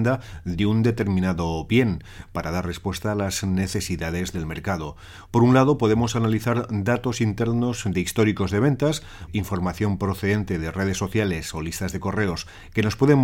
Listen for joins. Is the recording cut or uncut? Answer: cut